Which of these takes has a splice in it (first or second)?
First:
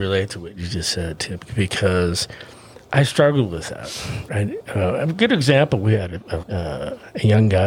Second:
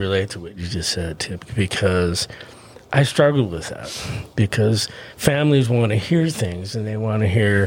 first